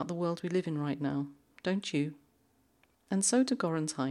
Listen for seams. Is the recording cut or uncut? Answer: cut